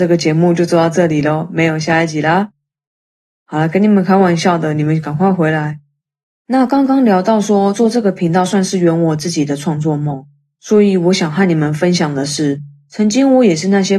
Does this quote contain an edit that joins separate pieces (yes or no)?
no